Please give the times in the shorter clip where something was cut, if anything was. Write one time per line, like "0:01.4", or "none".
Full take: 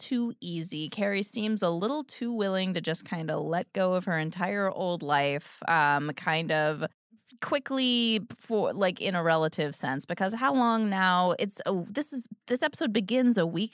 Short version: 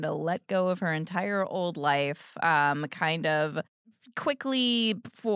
none